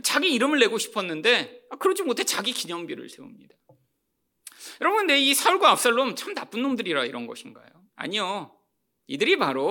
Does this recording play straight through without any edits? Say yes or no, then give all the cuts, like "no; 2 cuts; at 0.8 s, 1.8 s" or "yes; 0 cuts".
yes; 0 cuts